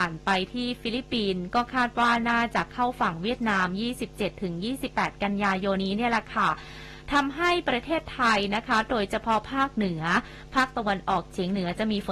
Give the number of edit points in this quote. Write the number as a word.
one